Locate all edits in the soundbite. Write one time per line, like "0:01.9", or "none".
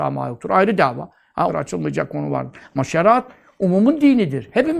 0:01.5